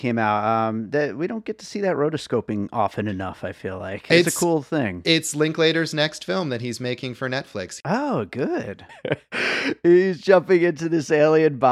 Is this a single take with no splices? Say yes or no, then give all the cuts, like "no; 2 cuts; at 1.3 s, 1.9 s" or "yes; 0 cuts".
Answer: no; 2 cuts; at 7.8 s, 8.9 s